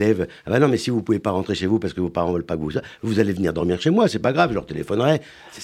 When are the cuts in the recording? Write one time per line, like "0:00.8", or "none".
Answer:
none